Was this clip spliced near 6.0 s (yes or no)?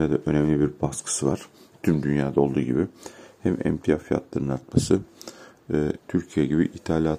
yes